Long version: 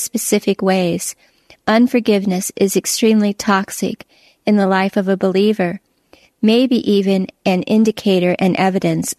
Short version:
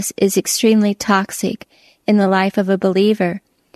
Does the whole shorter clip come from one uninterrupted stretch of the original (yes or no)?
yes